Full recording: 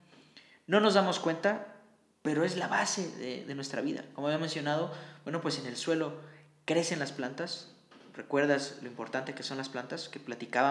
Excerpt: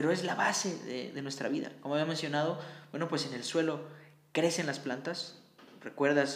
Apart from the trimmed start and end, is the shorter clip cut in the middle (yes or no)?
no